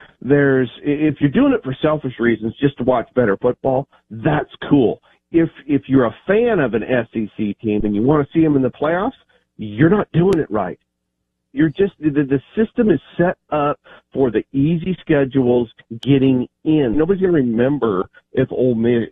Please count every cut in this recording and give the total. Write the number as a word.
one